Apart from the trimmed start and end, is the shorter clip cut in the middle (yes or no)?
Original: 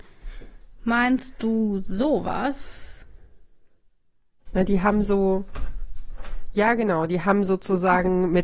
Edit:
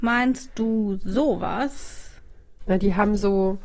yes